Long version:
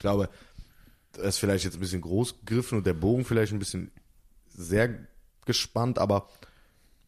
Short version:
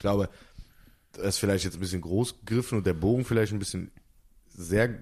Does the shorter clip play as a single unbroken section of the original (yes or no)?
yes